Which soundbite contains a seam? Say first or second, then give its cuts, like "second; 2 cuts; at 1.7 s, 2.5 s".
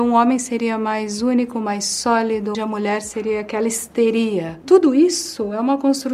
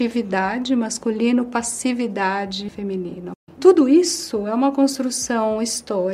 first; 2 cuts; at 2.5 s, 4.6 s